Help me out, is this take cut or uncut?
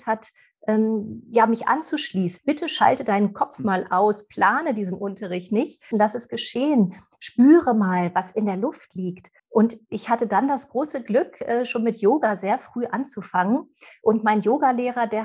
cut